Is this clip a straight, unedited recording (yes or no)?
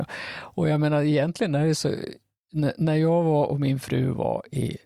yes